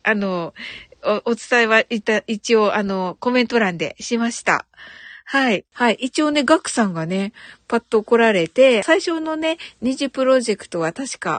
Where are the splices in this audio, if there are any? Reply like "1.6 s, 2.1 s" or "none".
5.7 s, 8.8 s